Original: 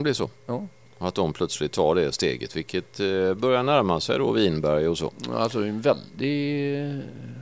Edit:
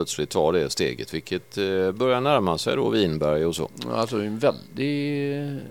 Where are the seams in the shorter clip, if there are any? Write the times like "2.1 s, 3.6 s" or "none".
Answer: none